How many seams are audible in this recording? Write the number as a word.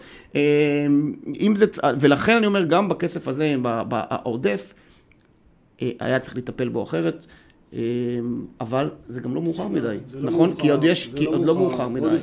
zero